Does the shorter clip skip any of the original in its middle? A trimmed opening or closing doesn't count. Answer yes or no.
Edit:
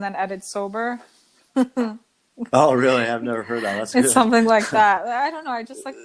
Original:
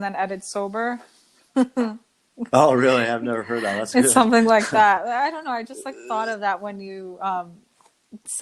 no